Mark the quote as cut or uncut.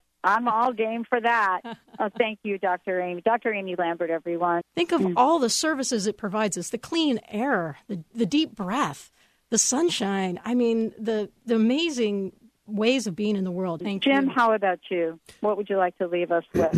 cut